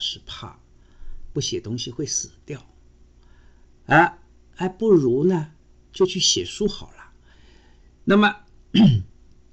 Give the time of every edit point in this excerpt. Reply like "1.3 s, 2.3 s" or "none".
7.3 s

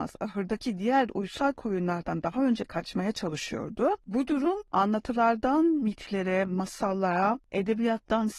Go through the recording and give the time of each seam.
4.0 s

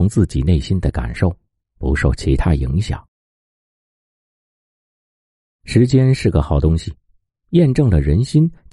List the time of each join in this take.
none

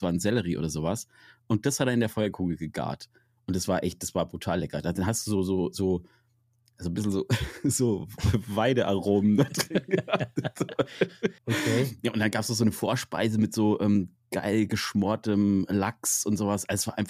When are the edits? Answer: 11.4 s

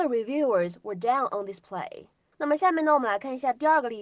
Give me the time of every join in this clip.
2.3 s

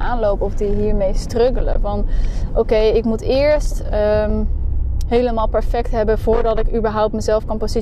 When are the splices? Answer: 5.1 s

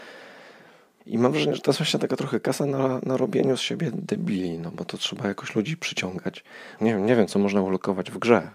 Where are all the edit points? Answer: 1.0 s, 6.8 s

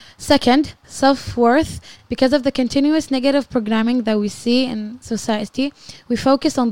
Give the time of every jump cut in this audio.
none

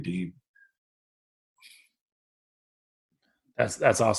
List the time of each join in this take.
none

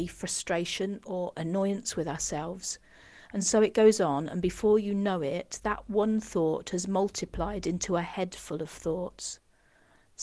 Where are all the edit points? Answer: none

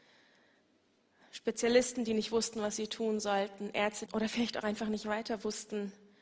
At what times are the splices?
4.1 s

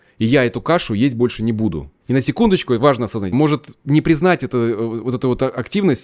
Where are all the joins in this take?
2.0 s, 3.3 s

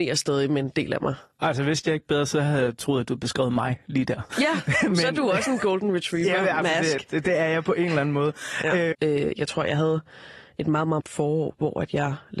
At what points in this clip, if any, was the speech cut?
8.9 s, 11.0 s

